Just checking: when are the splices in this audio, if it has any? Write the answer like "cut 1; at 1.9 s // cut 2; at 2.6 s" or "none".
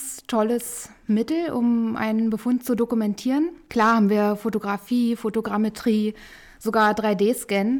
none